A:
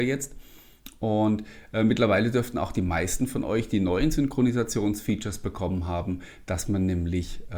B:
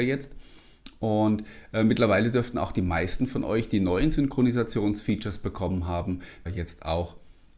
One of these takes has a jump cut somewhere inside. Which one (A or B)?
B